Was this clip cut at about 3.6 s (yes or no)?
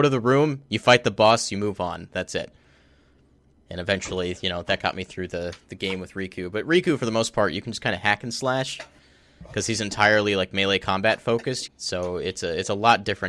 yes